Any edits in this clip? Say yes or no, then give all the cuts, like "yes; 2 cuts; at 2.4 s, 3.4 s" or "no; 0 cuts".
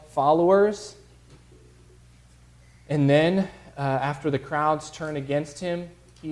no; 0 cuts